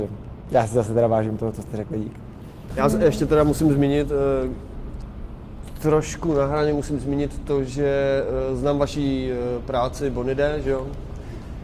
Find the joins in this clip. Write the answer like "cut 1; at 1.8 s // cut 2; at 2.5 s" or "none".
none